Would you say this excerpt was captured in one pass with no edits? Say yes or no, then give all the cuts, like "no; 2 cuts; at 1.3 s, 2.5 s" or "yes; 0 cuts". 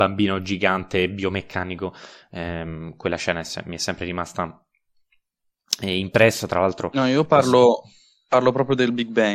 yes; 0 cuts